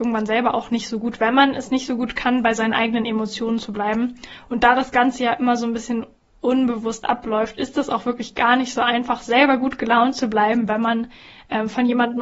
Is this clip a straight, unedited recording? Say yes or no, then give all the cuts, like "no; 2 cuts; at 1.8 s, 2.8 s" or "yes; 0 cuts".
yes; 0 cuts